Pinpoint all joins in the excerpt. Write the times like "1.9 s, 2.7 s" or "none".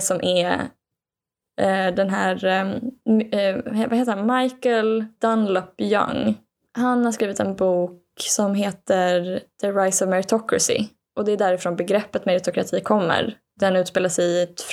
none